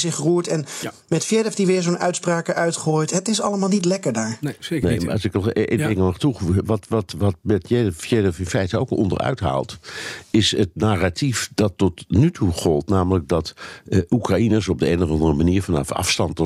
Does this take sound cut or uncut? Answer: uncut